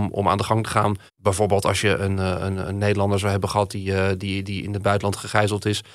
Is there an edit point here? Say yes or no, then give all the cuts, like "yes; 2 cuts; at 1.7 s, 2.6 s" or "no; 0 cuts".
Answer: yes; 1 cut; at 1.1 s